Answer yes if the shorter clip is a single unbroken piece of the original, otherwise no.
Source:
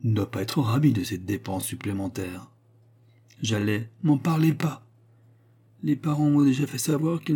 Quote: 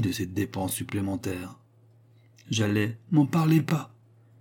yes